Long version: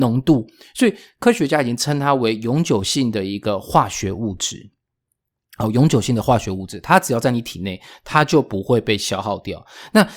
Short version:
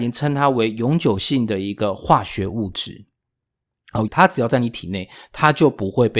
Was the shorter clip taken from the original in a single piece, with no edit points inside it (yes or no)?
no